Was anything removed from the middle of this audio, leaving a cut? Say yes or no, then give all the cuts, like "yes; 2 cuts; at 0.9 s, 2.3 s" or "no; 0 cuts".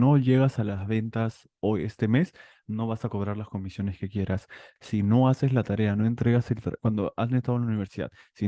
yes; 1 cut; at 4.8 s